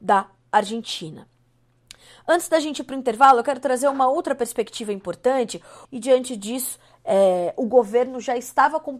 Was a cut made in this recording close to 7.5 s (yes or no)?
no